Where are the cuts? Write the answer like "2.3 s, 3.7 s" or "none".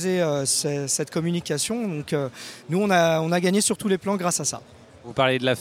none